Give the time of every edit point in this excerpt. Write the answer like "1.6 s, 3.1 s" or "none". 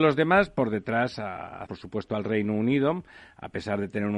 1.7 s